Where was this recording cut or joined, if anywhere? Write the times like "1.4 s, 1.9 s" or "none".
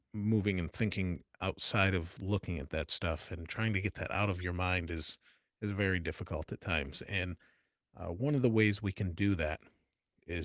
none

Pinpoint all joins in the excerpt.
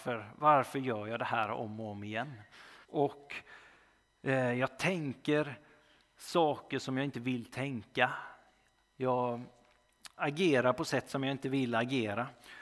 2.8 s, 10.1 s

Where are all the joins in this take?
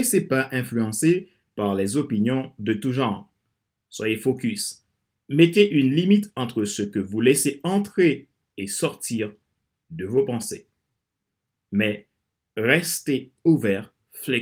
none

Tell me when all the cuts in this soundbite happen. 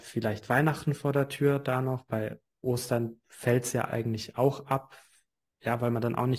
none

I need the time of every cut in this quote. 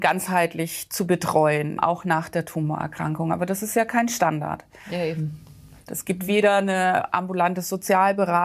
1.8 s, 5.9 s

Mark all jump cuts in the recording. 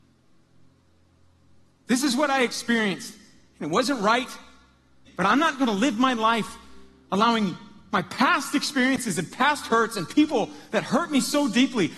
5.1 s

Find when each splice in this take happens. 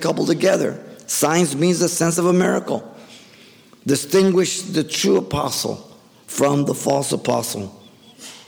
none

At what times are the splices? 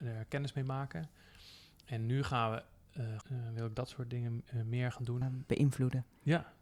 3.2 s, 5.2 s

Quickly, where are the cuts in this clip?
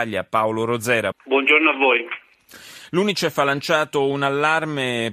1.1 s

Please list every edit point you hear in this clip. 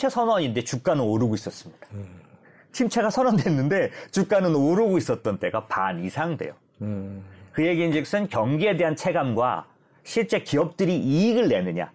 none

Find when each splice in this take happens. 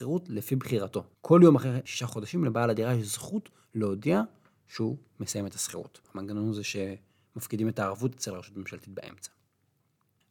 6.0 s

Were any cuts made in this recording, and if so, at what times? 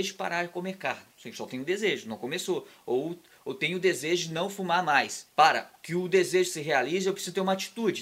5.3 s

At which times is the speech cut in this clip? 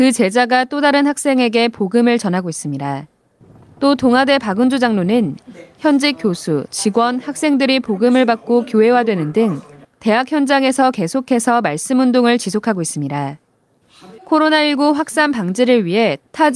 14.2 s

